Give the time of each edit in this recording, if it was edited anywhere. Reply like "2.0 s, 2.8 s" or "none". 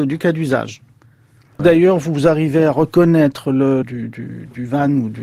1.6 s, 3.8 s